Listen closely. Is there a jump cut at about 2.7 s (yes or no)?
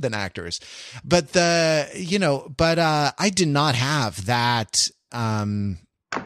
no